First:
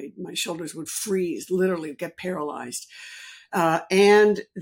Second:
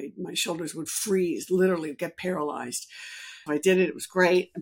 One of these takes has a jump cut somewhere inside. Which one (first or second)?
second